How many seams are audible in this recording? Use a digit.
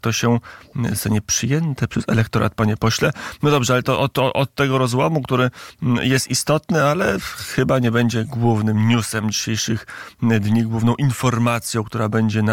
0